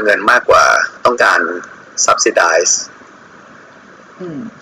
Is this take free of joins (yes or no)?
no